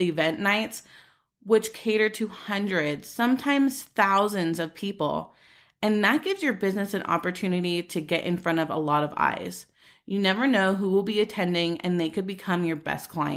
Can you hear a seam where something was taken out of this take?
no; 0 cuts

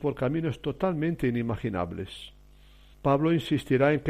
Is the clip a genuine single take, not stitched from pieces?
no; 1 cut; at 2.9 s

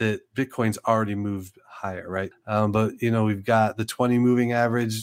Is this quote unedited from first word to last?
no; 1 cut; at 2.3 s

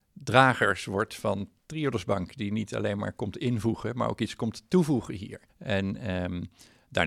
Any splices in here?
yes; 1 cut; at 5.5 s

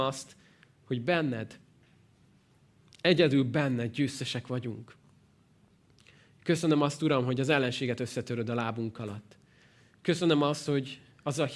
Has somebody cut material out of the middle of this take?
no; 0 cuts

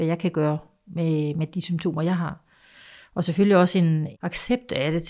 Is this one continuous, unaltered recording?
yes; 0 cuts

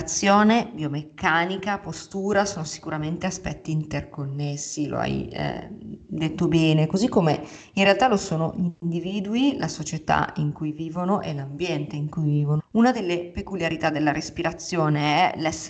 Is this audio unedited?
no; 1 cut; at 12.6 s

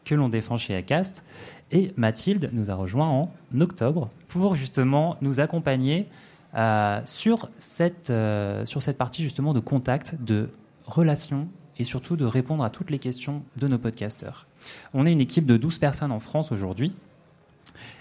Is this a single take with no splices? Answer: no; 1 cut; at 4.2 s

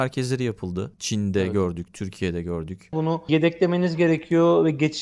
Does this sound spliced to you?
yes; 2 cuts; at 0.9 s, 2.9 s

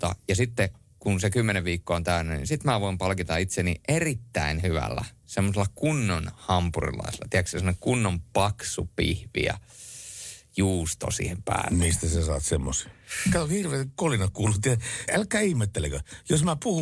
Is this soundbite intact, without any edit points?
no; 1 cut; at 15.1 s

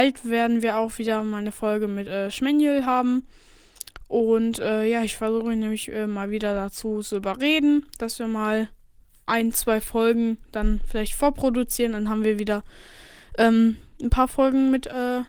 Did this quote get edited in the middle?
no; 0 cuts

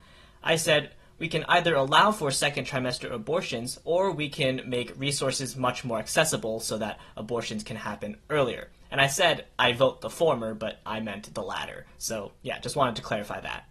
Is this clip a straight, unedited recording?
yes; 0 cuts

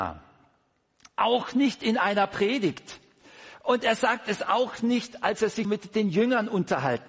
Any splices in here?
yes; 1 cut; at 5.6 s

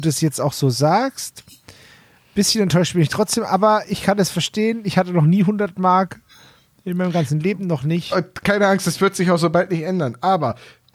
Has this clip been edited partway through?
no; 0 cuts

